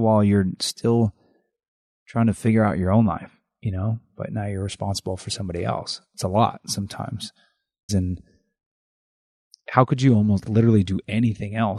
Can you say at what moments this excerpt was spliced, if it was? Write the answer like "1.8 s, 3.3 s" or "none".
7.9 s, 10.4 s